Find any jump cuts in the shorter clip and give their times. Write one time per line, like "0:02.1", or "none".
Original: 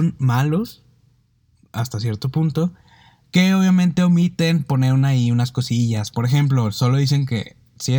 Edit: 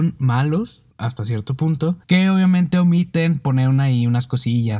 0:00.9
0:02.0